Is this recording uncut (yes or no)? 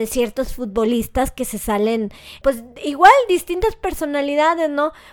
no